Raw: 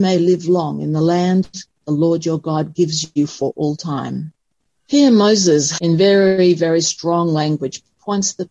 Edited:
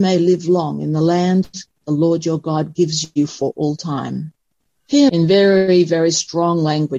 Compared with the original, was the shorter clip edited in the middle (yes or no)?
yes